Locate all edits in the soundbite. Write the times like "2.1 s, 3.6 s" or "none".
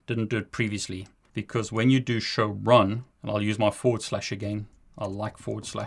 1.3 s, 3.1 s